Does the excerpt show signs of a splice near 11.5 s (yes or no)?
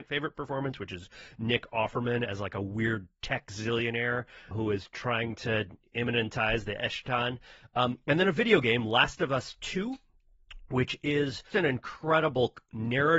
yes